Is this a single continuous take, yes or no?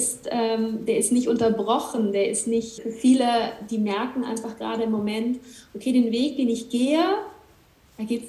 no